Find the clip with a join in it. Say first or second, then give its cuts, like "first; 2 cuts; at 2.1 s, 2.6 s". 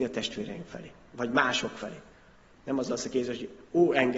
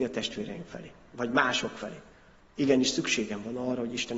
second; 1 cut; at 2.4 s